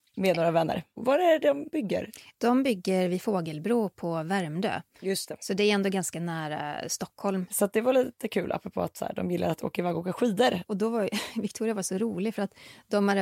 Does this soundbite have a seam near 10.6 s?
yes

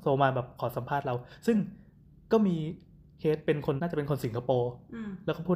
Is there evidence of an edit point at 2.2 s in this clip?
no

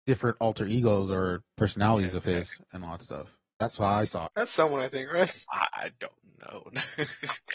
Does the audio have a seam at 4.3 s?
yes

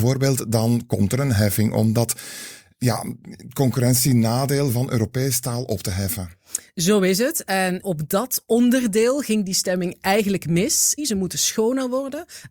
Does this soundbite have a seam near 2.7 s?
no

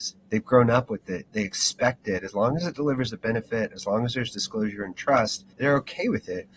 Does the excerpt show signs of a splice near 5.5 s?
yes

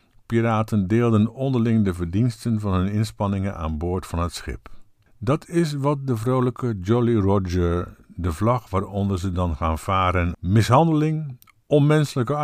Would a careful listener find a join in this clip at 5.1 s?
yes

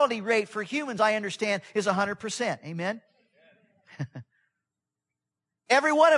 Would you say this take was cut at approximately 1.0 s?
no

